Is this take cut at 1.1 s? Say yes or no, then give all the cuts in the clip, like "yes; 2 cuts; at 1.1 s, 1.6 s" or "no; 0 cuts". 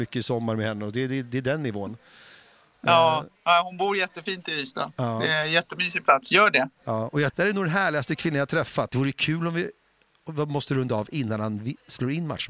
no; 3 cuts; at 3.4 s, 7.3 s, 8.9 s